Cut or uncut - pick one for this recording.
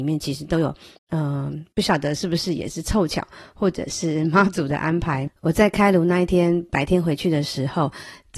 cut